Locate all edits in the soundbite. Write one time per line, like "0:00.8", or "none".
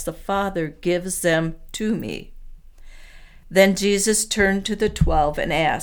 0:03.4